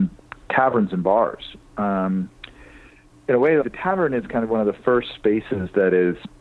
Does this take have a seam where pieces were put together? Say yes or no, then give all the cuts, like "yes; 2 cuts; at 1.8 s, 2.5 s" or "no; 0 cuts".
yes; 1 cut; at 3.6 s